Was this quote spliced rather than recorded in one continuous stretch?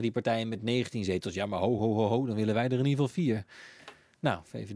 yes; 1 cut; at 1.8 s

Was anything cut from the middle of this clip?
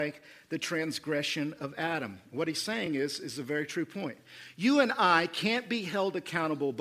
no; 0 cuts

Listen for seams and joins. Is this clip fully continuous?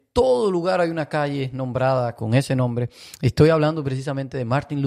no; 1 cut; at 2.2 s

